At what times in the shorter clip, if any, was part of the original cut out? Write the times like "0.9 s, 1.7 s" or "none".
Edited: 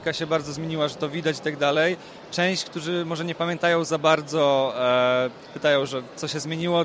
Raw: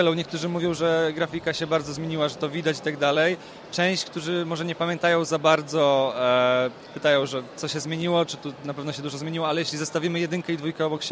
none